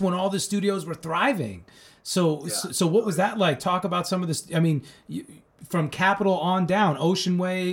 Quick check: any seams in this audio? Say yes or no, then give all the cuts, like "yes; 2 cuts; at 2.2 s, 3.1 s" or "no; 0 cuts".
no; 0 cuts